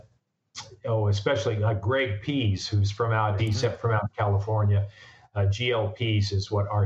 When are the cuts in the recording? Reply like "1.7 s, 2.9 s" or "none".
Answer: 3.4 s

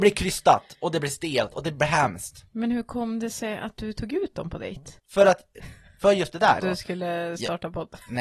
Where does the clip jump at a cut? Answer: 5.0 s, 6.6 s

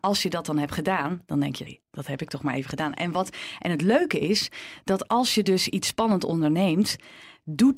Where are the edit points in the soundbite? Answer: 1.7 s

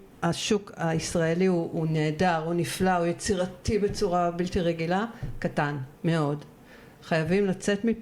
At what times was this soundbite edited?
5.9 s

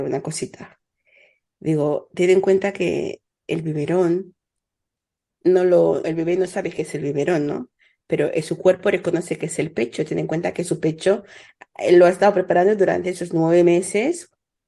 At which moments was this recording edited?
6.0 s

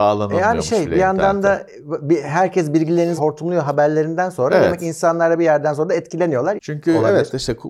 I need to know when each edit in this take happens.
3.2 s, 6.6 s

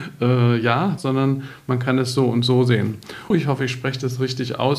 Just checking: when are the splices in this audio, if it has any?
1.0 s, 3.3 s

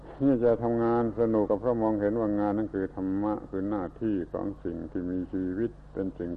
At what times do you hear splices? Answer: 1.5 s

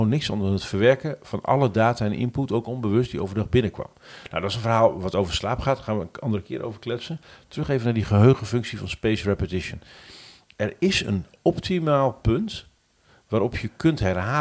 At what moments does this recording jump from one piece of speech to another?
none

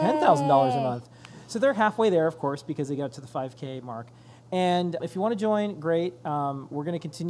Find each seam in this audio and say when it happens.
5.0 s

